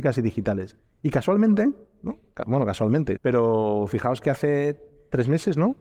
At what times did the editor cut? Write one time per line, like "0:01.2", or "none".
0:03.2